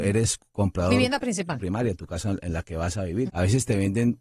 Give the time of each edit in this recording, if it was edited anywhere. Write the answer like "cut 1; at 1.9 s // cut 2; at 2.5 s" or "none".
cut 1; at 1.6 s // cut 2; at 3.3 s

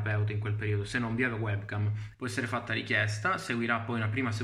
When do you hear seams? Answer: cut 1; at 2.1 s

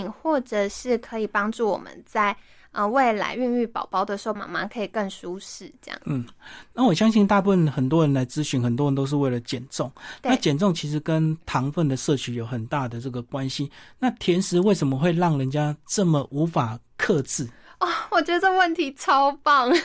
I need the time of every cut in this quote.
cut 1; at 4.4 s

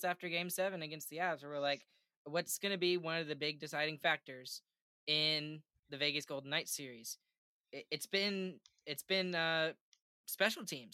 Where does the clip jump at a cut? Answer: none

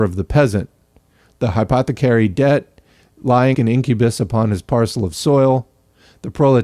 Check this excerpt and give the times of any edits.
cut 1; at 3.5 s

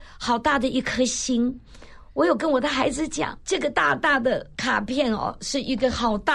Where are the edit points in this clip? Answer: none

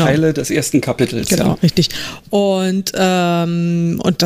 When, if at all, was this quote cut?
cut 1; at 1.6 s

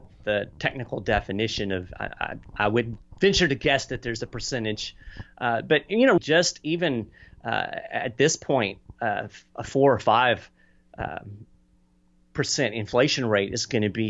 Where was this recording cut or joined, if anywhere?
cut 1; at 6.2 s

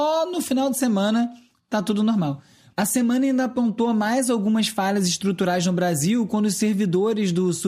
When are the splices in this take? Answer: cut 1; at 2.7 s

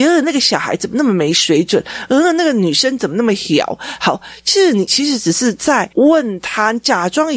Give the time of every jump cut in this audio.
none

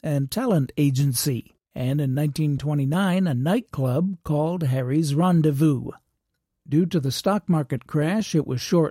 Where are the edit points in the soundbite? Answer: cut 1; at 1.6 s

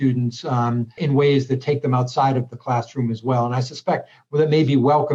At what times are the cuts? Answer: cut 1; at 1.0 s

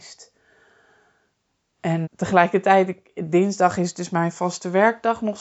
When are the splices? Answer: cut 1; at 2.0 s

